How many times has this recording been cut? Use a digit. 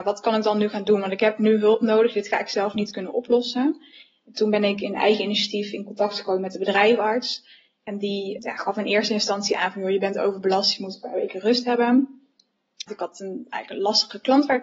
2